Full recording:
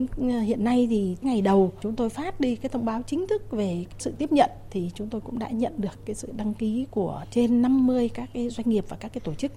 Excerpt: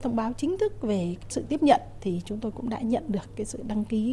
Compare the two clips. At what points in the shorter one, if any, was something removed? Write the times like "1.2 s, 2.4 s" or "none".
none